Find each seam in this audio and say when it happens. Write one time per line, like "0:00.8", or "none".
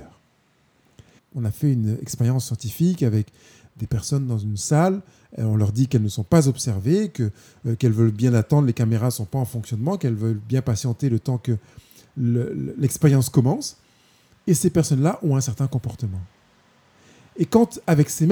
0:01.2